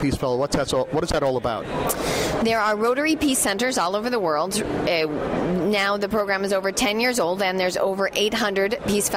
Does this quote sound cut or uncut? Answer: uncut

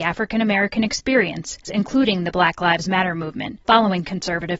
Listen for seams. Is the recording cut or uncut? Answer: cut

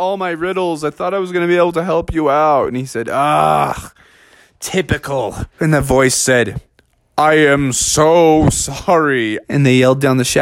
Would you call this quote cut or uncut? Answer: cut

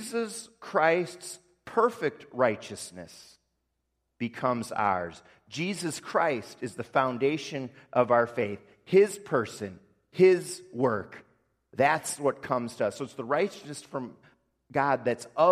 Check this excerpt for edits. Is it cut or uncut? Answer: uncut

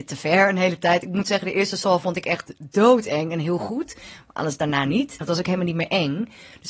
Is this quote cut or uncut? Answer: cut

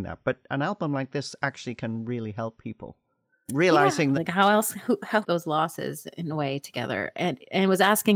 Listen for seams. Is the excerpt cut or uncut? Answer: cut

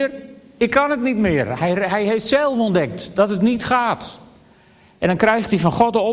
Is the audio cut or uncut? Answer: uncut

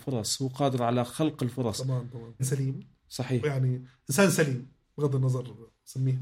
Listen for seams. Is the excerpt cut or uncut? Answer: cut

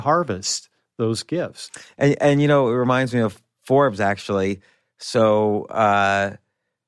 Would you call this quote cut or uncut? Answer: uncut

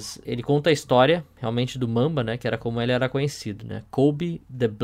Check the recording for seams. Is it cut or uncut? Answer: uncut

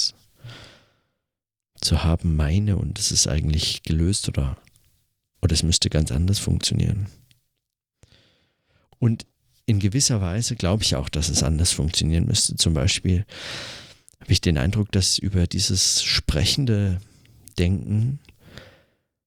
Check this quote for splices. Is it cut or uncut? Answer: uncut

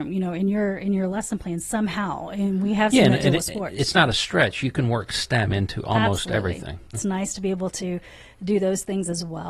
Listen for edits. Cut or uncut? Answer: cut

